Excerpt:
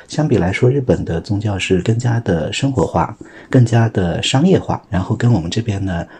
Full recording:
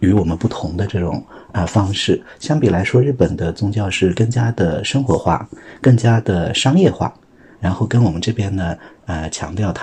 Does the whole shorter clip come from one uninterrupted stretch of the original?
no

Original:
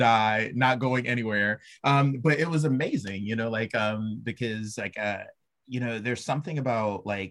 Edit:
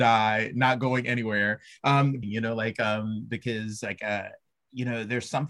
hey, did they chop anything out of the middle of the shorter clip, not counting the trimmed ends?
yes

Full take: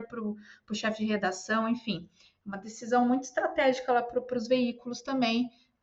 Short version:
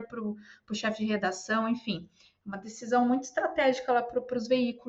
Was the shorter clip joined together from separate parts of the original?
no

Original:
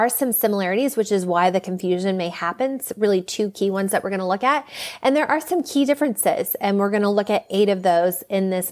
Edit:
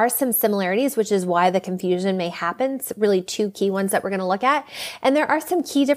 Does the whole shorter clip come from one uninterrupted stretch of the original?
yes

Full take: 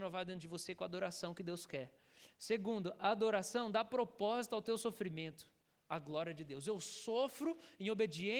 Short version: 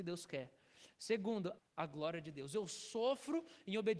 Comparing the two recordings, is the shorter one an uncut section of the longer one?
no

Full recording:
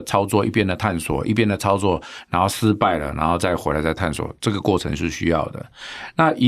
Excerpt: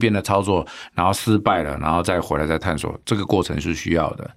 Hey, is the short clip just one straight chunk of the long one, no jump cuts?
yes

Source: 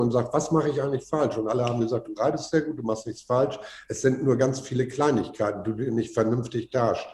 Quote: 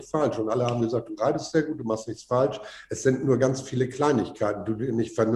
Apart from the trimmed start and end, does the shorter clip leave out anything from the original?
no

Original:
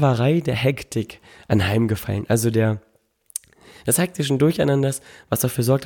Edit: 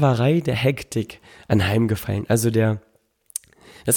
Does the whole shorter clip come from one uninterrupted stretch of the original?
yes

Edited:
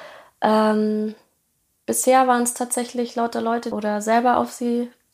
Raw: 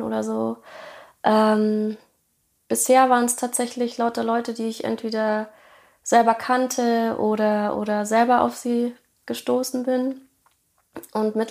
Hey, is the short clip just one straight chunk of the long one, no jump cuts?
no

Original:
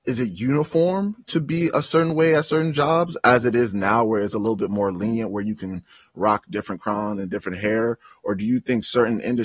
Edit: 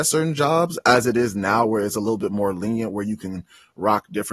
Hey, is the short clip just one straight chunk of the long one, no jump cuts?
yes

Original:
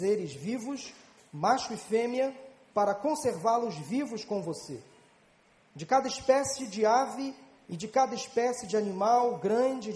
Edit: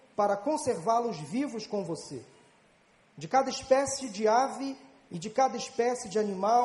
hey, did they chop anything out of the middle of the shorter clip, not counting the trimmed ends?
no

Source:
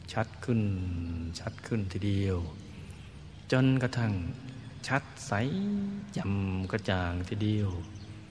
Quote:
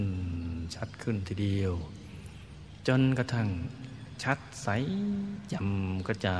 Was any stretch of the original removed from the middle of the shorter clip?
no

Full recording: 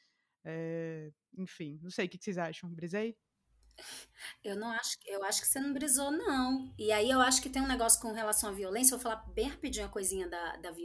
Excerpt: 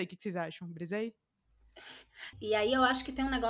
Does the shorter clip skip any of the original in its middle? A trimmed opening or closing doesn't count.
yes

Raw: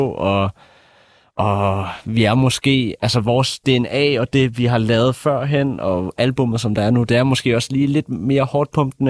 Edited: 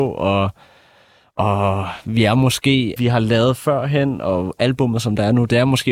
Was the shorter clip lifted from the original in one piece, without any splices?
no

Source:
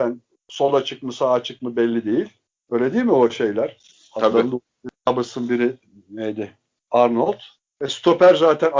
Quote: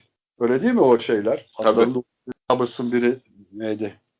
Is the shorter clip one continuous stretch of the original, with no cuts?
no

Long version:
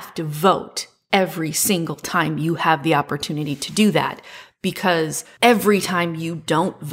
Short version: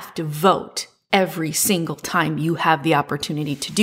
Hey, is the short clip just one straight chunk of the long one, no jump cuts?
yes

